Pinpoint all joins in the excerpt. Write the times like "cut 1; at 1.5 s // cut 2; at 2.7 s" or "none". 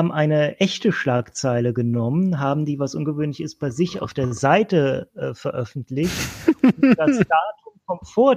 none